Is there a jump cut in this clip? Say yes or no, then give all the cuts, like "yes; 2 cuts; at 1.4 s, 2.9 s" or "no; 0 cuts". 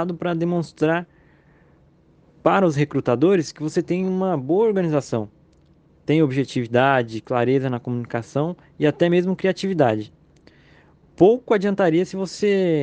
no; 0 cuts